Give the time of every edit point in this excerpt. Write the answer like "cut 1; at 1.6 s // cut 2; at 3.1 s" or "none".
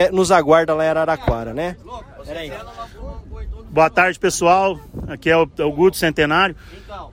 cut 1; at 1.8 s